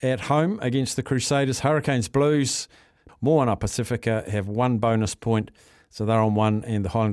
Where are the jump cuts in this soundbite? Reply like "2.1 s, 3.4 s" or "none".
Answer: 3.1 s